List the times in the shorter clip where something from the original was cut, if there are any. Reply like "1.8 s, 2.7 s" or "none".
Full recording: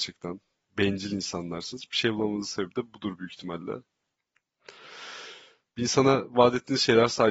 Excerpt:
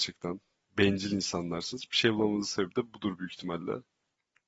none